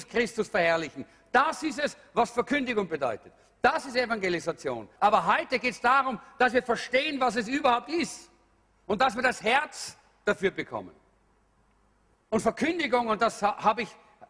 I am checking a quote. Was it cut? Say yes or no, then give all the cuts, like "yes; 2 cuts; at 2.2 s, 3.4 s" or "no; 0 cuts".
yes; 2 cuts; at 5.0 s, 12.1 s